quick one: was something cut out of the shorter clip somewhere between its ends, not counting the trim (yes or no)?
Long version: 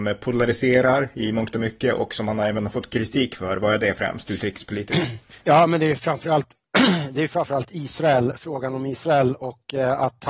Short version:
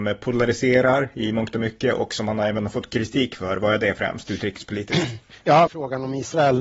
yes